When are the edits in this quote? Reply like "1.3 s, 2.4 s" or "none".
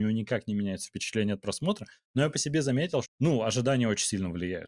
2.0 s, 3.0 s